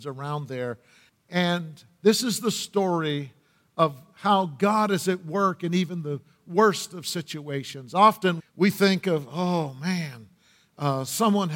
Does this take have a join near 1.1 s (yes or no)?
yes